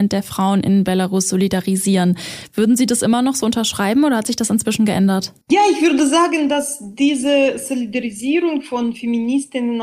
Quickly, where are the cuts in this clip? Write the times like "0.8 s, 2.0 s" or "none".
5.4 s